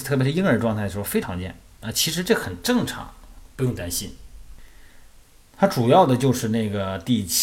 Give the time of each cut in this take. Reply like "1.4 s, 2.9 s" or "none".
1.2 s